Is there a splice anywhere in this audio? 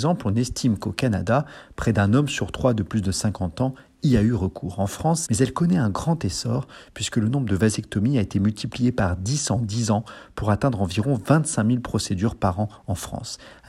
yes; 1 cut; at 5.3 s

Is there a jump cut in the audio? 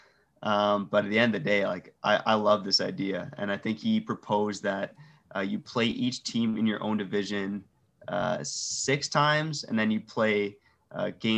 no; 0 cuts

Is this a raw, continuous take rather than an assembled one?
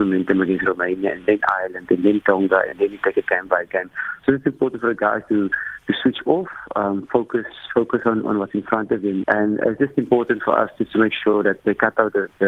no; 1 cut; at 9.2 s

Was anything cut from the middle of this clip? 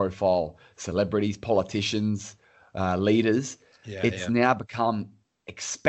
no; 0 cuts

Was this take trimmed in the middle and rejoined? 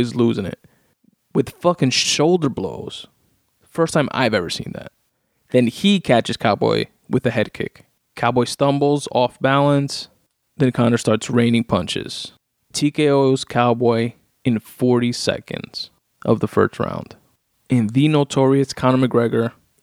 no; 0 cuts

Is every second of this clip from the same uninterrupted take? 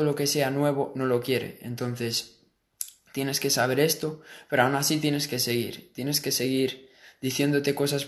yes; 0 cuts

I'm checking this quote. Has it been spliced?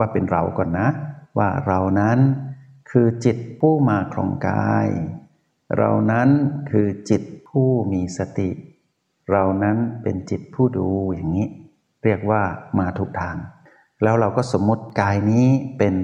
no; 0 cuts

